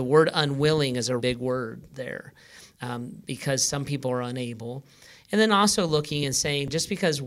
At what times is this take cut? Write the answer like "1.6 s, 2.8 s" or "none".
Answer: 1.2 s